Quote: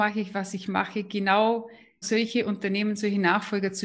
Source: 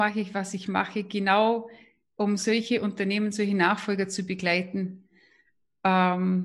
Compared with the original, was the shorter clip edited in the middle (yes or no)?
yes